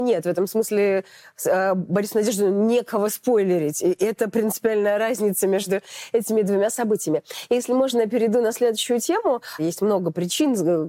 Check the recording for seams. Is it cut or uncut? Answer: cut